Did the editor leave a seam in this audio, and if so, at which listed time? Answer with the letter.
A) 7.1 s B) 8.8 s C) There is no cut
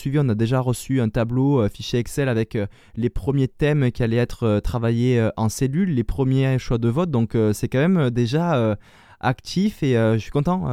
C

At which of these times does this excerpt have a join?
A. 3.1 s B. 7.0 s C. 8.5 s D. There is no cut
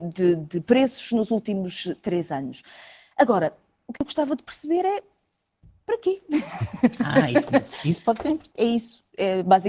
C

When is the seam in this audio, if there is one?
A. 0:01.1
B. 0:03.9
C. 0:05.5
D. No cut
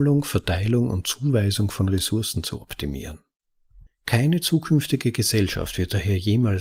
B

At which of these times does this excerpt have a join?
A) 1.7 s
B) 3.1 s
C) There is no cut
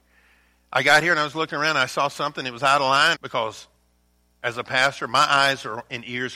B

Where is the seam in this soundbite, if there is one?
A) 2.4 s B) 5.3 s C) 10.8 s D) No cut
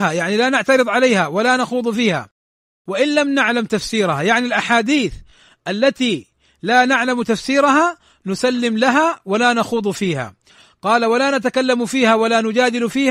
D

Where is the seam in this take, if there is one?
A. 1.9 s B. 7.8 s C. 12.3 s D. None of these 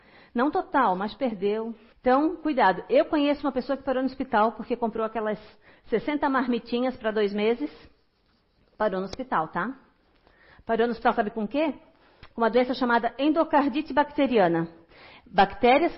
A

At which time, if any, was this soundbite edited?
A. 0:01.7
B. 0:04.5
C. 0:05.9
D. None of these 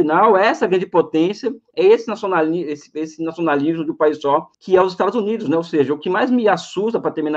B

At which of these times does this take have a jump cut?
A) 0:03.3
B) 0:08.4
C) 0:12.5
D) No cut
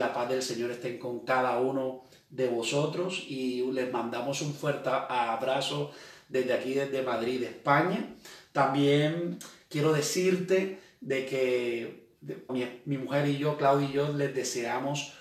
C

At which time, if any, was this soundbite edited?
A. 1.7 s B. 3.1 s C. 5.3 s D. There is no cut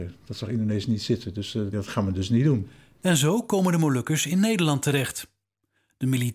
A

